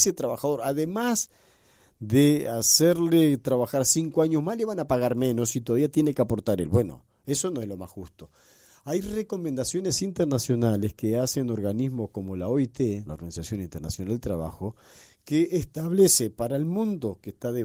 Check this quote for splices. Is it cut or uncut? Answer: cut